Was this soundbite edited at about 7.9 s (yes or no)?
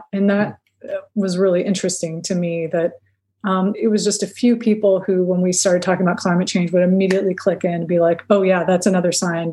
no